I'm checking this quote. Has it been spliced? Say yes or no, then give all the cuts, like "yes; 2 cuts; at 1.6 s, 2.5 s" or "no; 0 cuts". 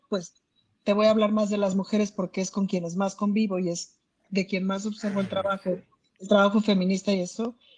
no; 0 cuts